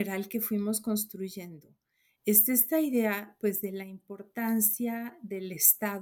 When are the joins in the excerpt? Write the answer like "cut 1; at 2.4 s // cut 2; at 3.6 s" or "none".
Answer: none